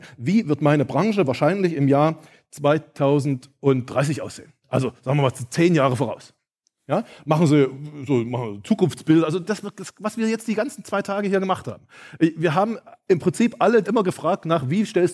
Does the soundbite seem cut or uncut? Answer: cut